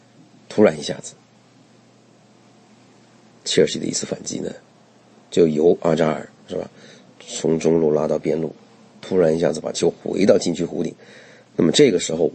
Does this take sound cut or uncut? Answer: uncut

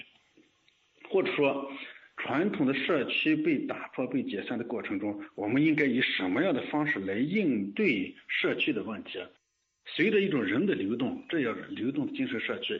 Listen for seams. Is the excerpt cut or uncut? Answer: uncut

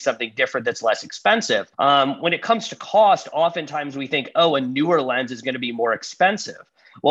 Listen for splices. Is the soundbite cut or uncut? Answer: cut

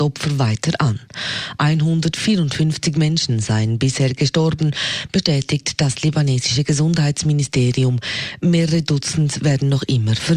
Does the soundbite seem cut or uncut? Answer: uncut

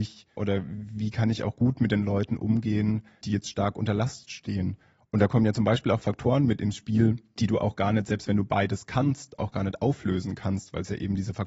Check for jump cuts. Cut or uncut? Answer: uncut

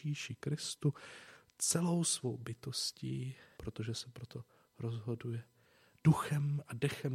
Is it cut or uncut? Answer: cut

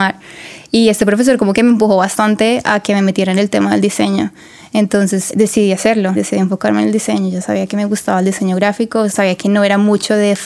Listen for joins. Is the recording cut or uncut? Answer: uncut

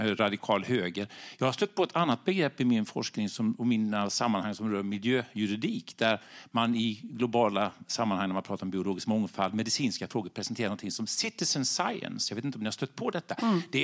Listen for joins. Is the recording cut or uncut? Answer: uncut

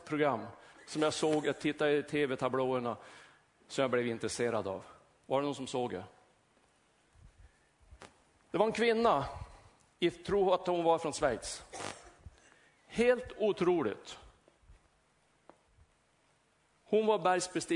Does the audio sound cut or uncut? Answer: cut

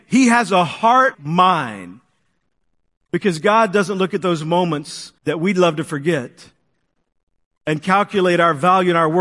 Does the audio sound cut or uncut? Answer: cut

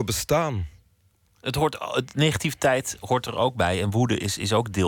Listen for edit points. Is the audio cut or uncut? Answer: uncut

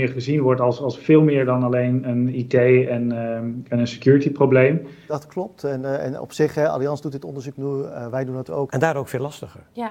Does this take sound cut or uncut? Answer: cut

